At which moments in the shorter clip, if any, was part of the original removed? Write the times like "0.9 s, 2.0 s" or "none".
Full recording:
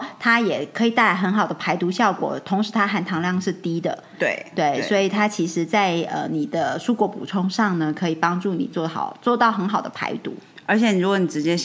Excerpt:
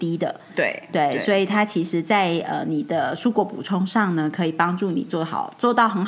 none